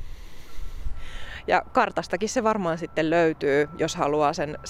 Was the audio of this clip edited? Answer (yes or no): no